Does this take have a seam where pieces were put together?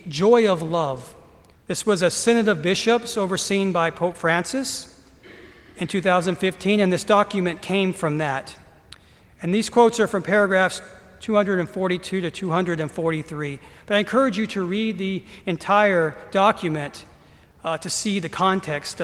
yes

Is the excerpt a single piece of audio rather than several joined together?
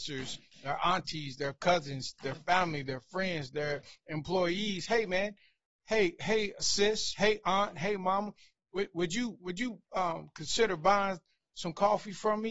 yes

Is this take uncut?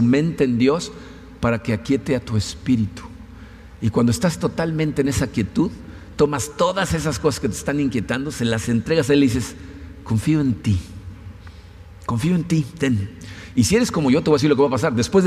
yes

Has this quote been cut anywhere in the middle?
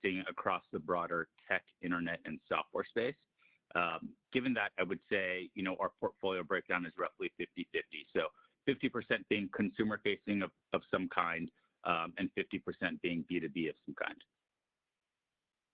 no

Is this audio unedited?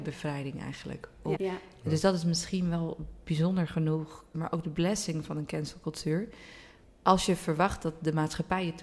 no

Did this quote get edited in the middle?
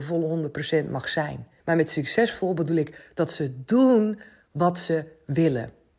yes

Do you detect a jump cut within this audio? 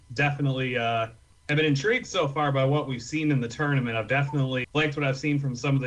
yes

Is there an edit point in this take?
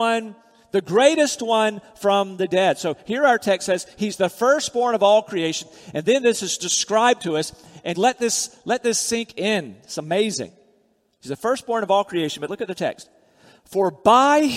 yes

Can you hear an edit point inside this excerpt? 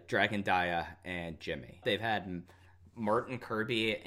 yes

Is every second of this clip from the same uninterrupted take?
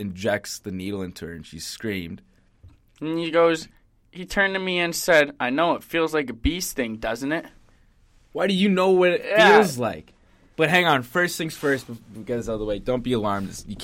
yes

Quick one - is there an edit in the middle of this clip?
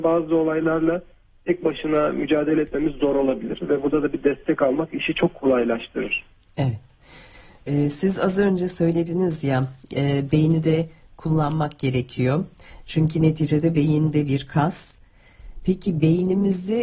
no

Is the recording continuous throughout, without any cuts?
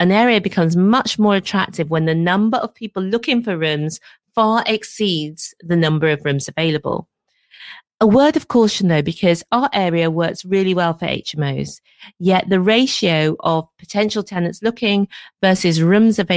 yes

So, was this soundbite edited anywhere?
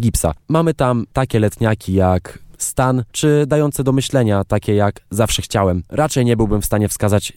yes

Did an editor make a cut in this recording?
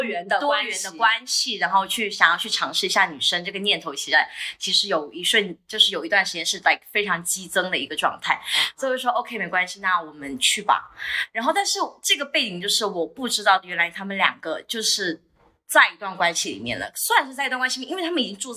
no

